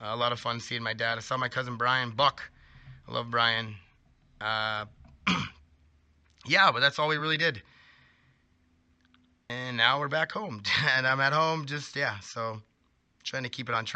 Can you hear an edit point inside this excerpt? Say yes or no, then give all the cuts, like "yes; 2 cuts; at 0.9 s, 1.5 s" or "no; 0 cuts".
no; 0 cuts